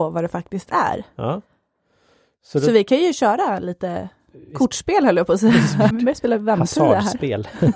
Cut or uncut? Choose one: cut